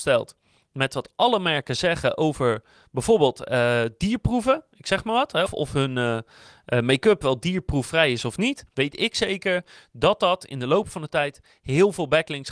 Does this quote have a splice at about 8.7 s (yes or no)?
yes